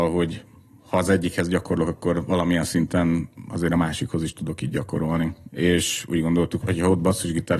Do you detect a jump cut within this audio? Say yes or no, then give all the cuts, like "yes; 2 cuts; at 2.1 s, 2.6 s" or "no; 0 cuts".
yes; 2 cuts; at 5.5 s, 6.6 s